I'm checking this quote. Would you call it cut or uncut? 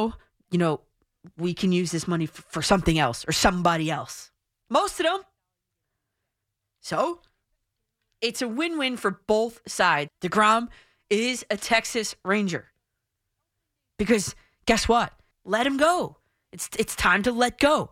cut